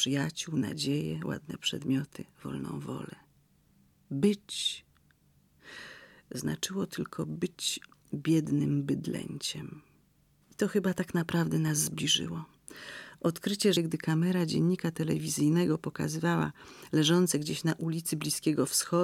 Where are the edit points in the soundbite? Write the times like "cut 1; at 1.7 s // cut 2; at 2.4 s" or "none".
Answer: cut 1; at 10.4 s // cut 2; at 13.8 s